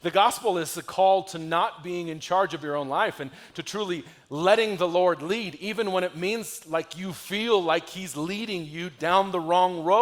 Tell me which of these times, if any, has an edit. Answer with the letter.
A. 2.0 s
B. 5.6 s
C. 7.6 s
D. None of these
D